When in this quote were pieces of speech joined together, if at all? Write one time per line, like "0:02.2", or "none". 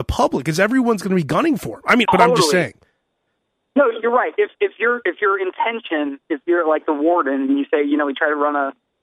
0:02.1